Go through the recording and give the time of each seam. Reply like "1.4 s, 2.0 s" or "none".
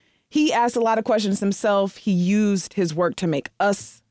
none